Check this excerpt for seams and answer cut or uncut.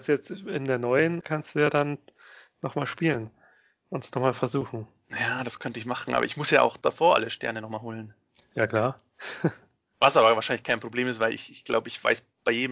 cut